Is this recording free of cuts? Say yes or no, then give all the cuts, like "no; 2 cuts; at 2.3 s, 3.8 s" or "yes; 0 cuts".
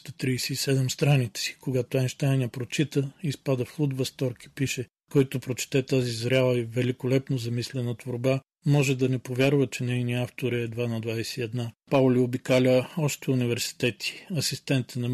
no; 1 cut; at 11.8 s